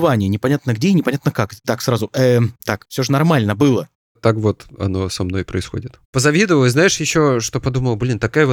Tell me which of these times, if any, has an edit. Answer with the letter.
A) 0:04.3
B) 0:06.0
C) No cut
B